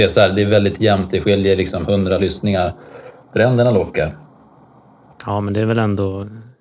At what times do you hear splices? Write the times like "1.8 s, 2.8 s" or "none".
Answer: 3.2 s